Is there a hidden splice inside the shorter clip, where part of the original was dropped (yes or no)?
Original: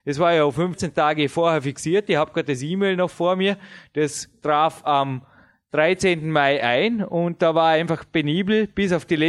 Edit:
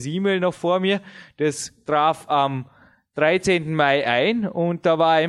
no